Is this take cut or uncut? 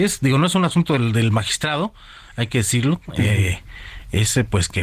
uncut